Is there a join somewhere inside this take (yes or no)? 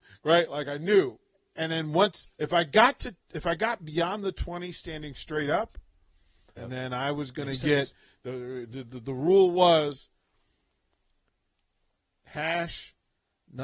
yes